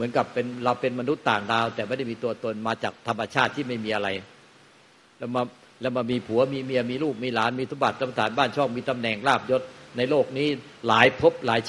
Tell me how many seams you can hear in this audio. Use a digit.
0